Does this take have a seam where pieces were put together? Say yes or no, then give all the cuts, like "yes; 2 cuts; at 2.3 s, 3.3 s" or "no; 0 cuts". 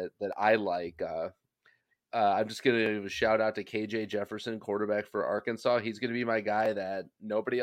no; 0 cuts